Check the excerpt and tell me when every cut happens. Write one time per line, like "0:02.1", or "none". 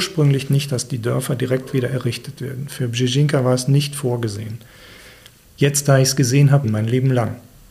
0:05.4
0:06.6